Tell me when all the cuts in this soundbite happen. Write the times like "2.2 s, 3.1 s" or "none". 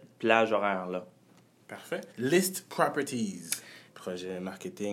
2.1 s, 3.9 s